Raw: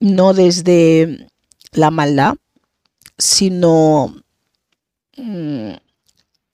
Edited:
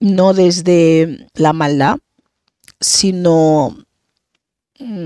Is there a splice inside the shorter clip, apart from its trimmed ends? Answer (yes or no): yes